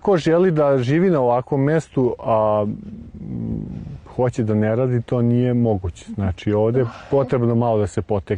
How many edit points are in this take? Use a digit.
0